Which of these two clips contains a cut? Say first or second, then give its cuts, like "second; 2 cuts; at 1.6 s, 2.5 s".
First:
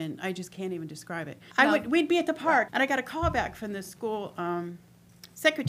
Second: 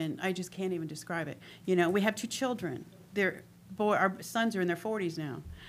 first; 2 cuts; at 1.5 s, 2.7 s